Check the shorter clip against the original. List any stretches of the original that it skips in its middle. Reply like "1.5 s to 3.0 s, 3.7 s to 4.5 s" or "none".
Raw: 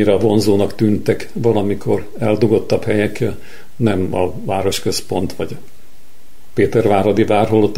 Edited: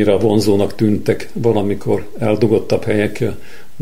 none